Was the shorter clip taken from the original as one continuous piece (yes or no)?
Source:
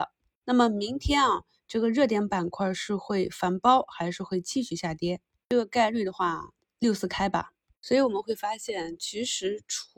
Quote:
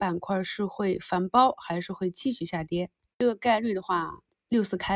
yes